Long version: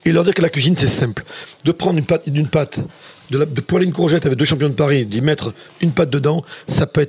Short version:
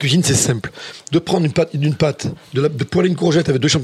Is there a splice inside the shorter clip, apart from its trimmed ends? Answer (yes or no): yes